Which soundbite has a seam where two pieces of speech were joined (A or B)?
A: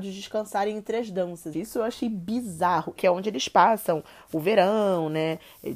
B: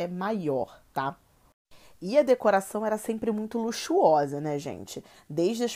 A